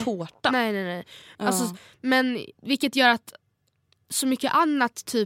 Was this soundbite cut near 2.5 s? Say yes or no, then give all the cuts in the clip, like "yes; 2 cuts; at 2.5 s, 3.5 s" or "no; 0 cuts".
yes; 2 cuts; at 1.4 s, 2.5 s